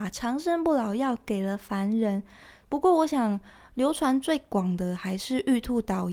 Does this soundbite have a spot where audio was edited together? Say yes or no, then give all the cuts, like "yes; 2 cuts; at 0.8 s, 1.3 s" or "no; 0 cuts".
yes; 1 cut; at 2.6 s